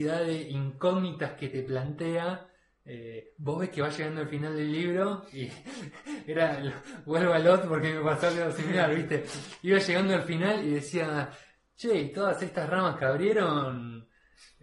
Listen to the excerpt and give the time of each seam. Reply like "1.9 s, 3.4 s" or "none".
none